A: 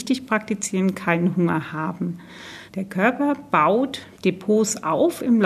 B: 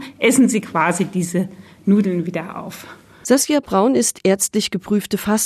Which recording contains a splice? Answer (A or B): A